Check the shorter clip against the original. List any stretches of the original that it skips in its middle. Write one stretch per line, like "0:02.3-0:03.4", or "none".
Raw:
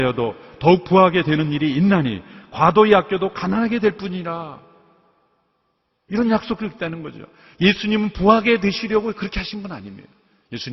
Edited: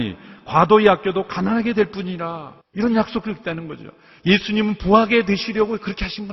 0:04.7-0:06.0